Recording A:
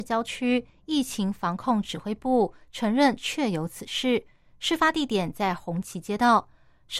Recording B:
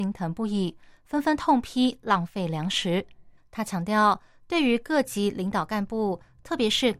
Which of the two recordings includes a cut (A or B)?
B